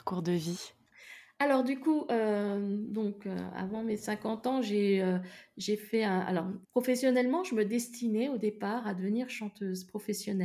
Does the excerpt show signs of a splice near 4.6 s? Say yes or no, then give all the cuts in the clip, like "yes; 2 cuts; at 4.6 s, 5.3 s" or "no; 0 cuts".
no; 1 cut; at 6.6 s